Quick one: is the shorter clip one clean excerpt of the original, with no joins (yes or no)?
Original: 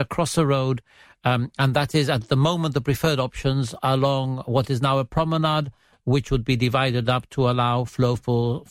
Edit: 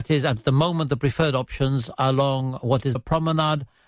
no